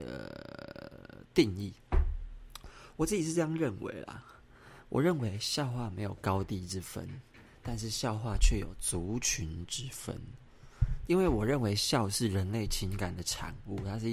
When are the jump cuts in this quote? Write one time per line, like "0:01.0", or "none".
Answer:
0:11.1